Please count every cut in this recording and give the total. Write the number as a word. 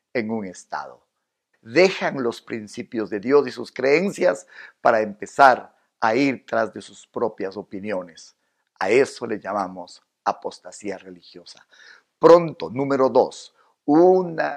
one